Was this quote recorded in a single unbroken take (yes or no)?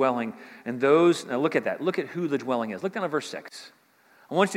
yes